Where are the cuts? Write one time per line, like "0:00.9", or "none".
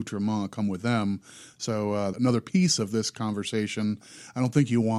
0:02.1